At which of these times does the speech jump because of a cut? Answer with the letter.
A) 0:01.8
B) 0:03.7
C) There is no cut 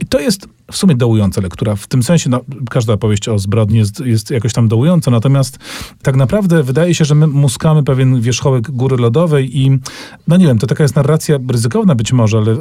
C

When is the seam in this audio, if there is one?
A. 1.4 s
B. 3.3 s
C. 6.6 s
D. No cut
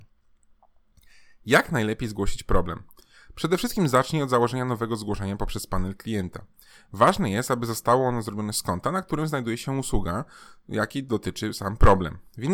D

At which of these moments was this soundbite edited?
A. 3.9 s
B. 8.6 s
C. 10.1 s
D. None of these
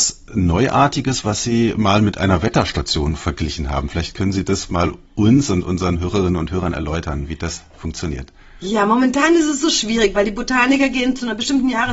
D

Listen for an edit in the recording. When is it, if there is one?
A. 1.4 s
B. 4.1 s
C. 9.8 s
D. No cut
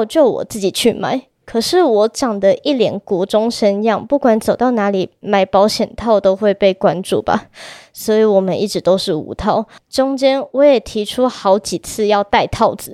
C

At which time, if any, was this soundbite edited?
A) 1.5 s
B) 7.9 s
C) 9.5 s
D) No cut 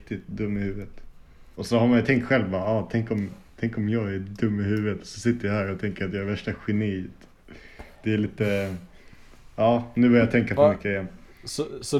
A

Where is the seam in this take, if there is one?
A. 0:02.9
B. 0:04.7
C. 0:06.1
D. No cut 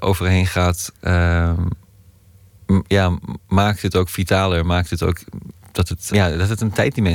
C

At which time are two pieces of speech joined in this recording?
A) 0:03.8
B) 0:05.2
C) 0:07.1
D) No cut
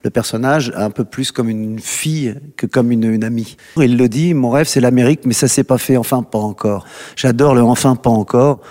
A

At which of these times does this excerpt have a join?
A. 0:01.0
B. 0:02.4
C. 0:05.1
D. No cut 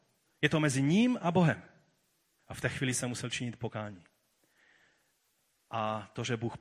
B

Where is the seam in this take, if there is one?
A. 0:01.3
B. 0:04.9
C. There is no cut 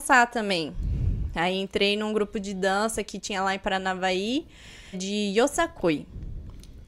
B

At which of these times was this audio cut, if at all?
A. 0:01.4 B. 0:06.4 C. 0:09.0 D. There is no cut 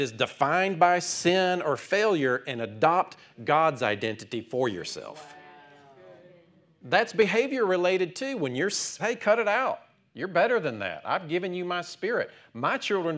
C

